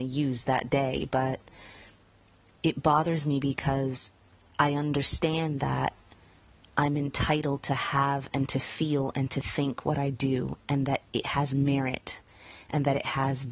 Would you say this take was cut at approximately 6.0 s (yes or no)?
no